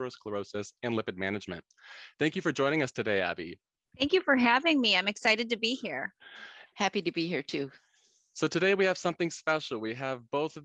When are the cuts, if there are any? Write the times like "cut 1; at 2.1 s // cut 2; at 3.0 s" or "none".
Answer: cut 1; at 6.7 s